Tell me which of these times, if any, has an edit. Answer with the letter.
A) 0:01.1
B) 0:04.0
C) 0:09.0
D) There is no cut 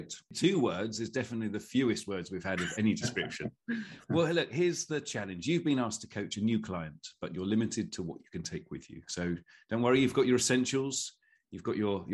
B